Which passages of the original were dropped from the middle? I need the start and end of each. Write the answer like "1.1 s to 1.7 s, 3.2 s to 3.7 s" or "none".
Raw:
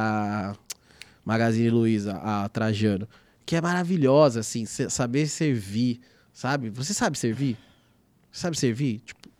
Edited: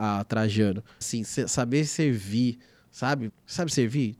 3.3 s to 4.4 s, 6.7 s to 8.1 s